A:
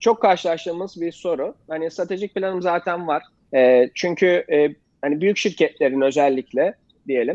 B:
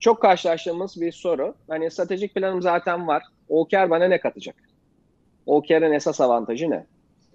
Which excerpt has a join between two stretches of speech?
A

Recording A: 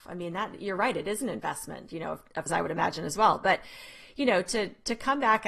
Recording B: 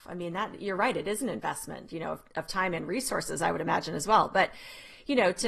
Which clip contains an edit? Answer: A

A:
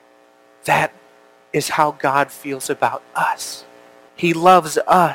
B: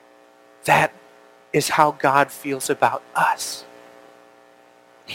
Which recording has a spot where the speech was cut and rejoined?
A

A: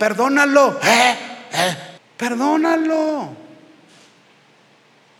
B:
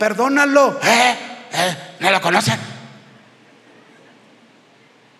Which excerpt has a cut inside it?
A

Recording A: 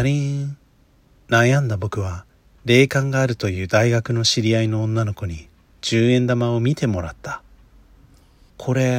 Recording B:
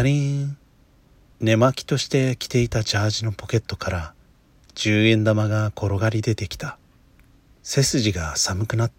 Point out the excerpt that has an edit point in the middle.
A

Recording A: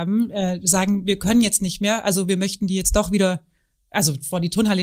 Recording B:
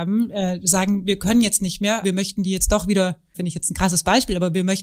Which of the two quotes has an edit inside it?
B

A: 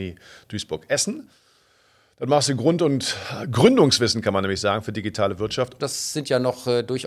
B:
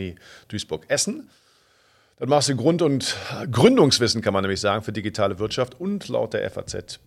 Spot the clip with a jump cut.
A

